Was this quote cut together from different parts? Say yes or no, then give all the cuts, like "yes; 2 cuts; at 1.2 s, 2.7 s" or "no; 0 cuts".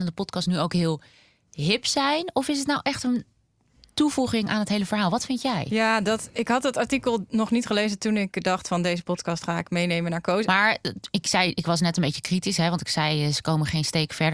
yes; 1 cut; at 10.4 s